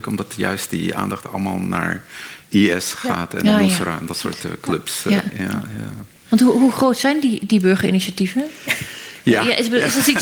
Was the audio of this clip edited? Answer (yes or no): no